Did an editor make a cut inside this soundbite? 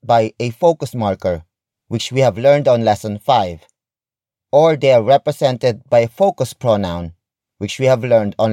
no; 0 cuts

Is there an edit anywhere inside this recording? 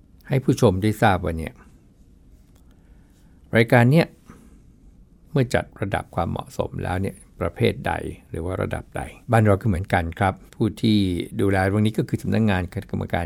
yes; 2 cuts; at 9.2 s, 10.5 s

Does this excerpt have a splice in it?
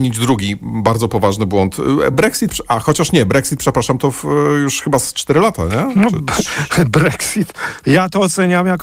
no; 0 cuts

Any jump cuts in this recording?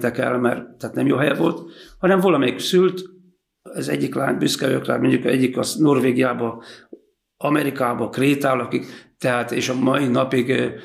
no; 0 cuts

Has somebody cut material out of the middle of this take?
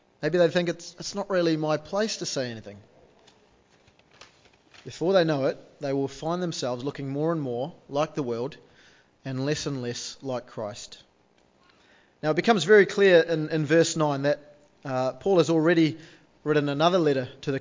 no; 0 cuts

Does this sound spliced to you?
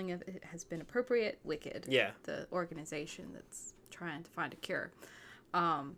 yes; 1 cut; at 1.4 s

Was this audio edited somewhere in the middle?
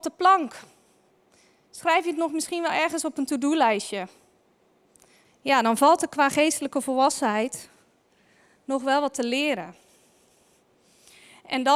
yes; 1 cut; at 5.2 s

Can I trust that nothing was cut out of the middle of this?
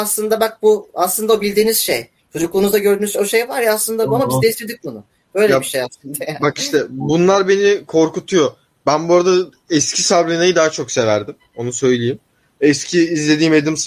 yes; 0 cuts

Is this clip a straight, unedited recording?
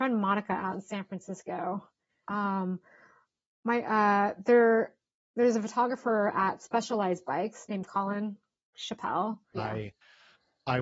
no; 2 cuts; at 2.2 s, 9.5 s

